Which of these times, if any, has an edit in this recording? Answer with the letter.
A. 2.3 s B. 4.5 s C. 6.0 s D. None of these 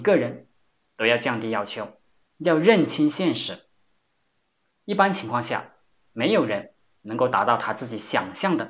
D